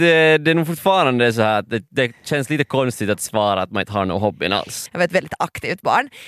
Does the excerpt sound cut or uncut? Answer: cut